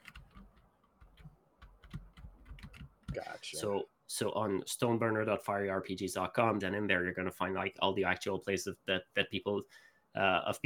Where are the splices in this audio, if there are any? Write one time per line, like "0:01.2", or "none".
0:03.1
0:06.6